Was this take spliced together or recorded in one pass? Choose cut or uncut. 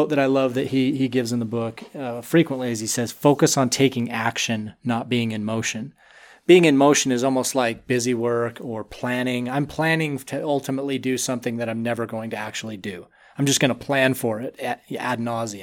uncut